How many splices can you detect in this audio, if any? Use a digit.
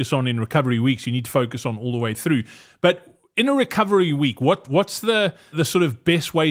1